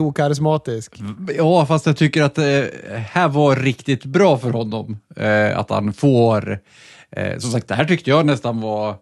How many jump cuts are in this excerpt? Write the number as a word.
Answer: zero